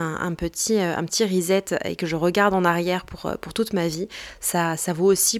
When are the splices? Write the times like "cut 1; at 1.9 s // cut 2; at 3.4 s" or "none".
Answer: none